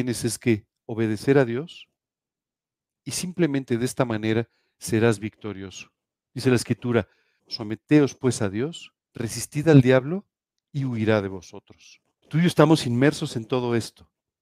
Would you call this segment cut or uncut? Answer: cut